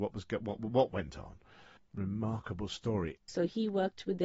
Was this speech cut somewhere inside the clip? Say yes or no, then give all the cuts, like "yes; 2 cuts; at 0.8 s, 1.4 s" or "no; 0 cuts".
yes; 2 cuts; at 1.8 s, 3.2 s